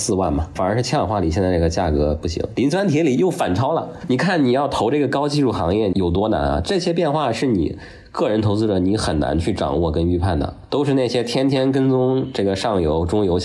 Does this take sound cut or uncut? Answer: uncut